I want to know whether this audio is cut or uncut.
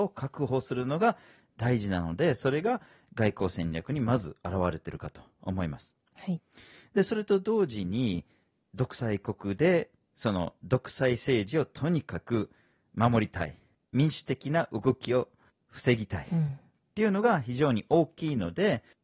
uncut